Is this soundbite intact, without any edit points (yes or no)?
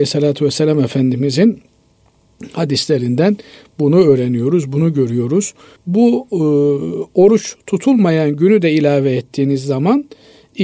no